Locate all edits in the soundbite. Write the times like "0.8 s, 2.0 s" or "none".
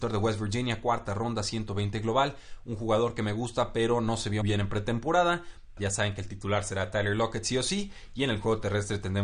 4.4 s, 5.8 s